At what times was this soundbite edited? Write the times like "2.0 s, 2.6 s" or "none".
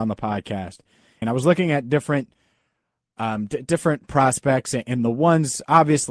1.2 s